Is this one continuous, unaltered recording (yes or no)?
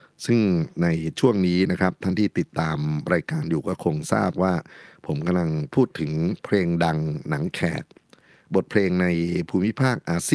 yes